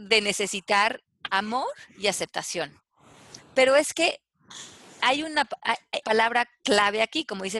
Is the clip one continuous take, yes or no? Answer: no